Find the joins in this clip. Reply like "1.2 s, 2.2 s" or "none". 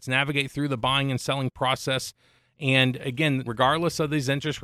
3.5 s